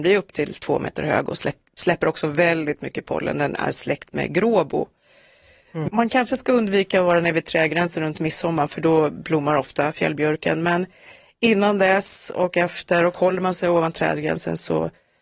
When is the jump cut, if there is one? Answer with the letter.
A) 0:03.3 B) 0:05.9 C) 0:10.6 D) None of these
B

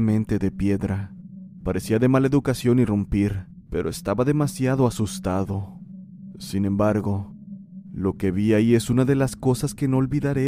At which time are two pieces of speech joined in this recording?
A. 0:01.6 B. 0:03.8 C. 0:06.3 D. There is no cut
A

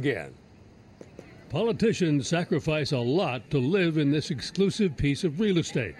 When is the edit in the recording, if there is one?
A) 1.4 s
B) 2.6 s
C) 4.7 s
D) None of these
D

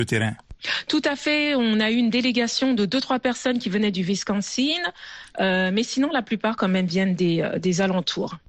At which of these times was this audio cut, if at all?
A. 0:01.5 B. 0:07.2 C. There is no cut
C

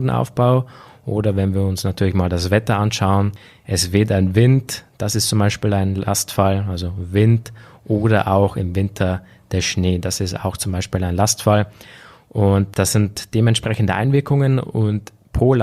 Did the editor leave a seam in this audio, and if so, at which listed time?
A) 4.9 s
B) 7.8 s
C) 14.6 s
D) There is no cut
D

